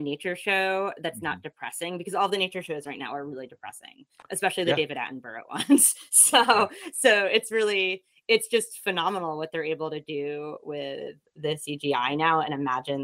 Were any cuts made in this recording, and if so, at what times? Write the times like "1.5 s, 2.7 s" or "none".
none